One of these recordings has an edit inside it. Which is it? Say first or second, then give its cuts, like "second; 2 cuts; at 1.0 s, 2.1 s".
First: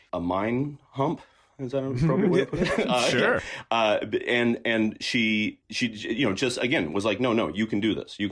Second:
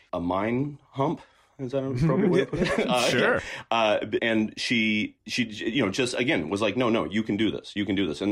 second; 1 cut; at 4.2 s